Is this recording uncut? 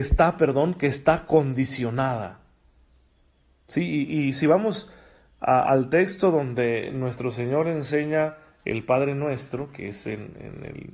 yes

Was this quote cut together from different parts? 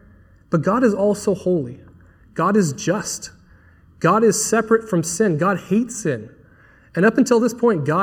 no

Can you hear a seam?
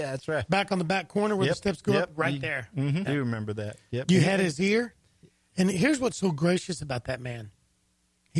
yes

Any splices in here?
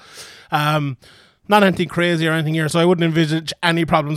yes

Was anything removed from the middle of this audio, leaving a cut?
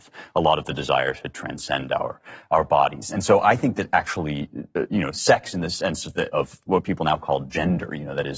no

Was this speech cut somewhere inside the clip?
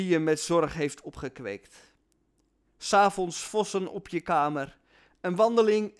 no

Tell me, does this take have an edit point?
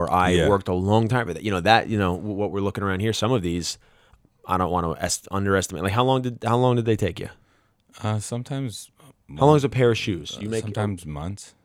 no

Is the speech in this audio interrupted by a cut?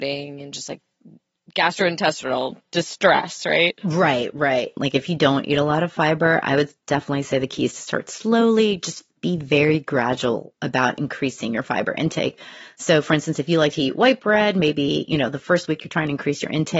yes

